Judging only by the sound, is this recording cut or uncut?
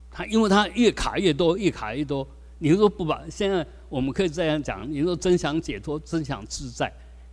uncut